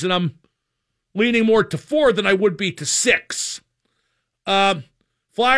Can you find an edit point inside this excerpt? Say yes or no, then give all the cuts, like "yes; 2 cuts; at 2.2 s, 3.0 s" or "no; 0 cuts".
no; 0 cuts